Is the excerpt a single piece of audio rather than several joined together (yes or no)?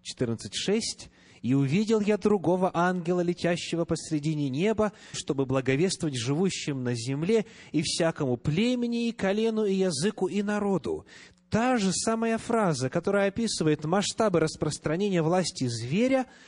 no